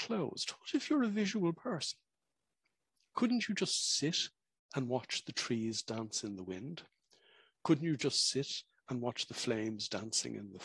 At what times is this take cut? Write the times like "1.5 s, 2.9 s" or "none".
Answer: none